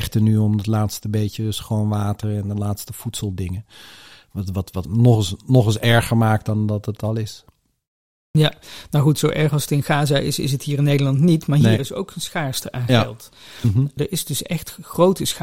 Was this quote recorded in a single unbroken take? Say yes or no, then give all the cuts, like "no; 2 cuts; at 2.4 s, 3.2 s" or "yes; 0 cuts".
no; 2 cuts; at 4.9 s, 14.0 s